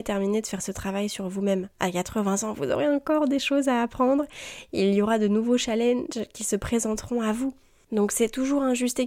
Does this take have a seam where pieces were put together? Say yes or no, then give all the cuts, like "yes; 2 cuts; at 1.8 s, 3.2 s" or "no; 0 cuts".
yes; 1 cut; at 7.8 s